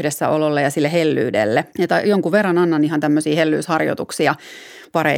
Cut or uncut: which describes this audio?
cut